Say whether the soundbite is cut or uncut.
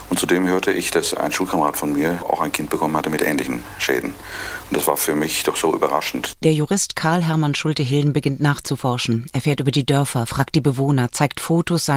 cut